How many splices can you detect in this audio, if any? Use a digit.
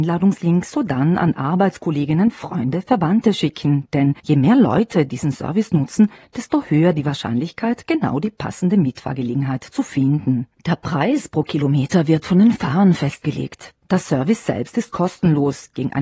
2